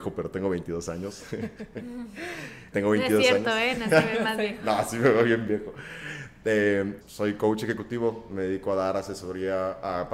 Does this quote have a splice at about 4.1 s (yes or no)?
no